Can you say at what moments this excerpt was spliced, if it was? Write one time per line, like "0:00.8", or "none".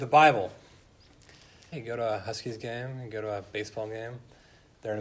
0:01.7